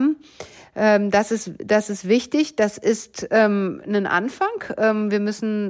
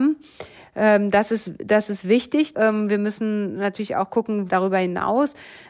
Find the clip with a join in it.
second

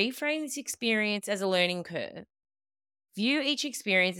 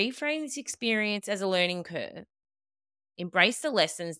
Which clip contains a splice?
second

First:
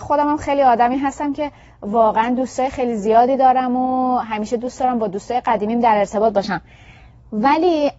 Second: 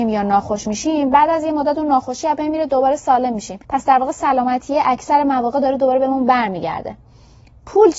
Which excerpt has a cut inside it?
second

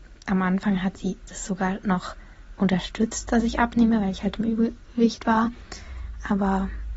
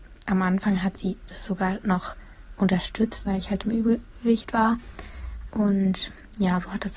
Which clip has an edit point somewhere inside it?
second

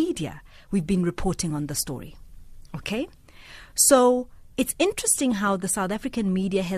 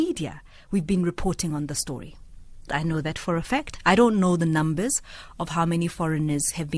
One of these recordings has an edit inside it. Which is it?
second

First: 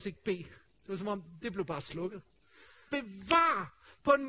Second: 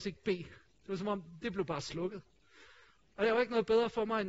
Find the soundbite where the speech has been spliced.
first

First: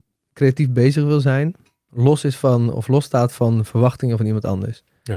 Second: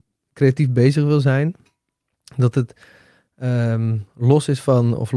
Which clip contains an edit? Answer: first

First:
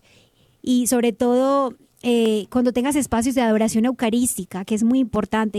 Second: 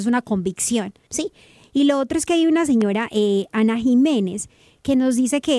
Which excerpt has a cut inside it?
second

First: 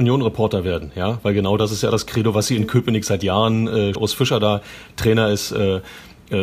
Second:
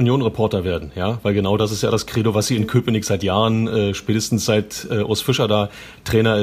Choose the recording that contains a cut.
first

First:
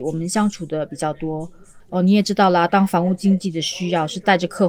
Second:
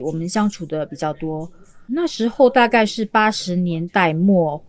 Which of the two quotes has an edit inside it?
first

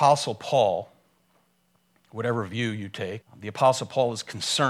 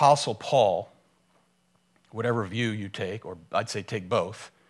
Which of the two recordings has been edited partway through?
first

